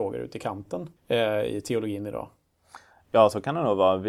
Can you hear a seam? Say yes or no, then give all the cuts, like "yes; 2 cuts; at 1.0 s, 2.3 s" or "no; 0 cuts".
yes; 1 cut; at 1.0 s